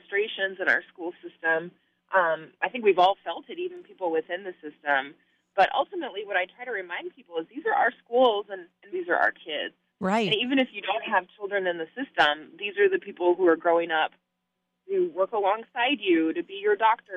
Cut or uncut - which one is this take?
cut